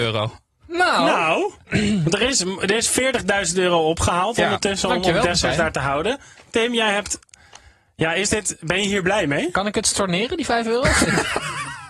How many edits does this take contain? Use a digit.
0